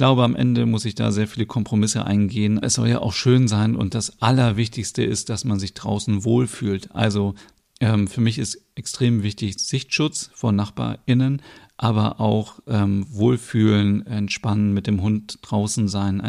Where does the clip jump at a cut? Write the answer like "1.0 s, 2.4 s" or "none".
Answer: 2.6 s